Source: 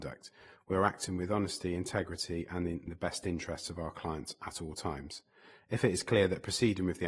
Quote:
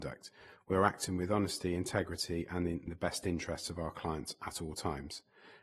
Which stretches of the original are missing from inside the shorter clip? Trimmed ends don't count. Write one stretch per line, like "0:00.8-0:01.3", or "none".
none

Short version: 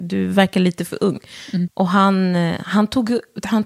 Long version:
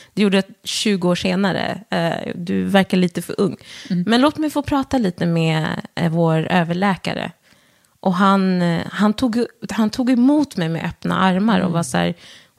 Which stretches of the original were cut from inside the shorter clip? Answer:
0:04.0-0:07.9

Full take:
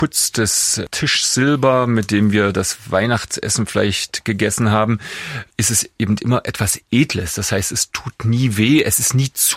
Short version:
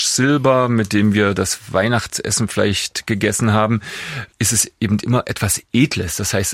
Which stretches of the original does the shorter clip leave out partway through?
none

